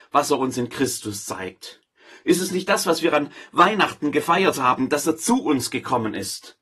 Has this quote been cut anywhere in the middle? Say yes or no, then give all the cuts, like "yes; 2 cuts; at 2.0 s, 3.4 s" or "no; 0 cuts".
no; 0 cuts